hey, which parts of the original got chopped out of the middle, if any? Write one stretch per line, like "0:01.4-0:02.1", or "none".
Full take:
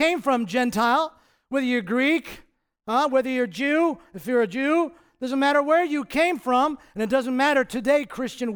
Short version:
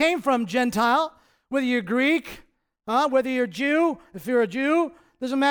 none